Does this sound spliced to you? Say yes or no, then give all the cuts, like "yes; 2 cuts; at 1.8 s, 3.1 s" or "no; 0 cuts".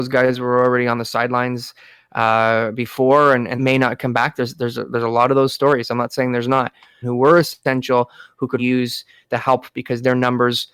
yes; 3 cuts; at 3.6 s, 7.0 s, 8.6 s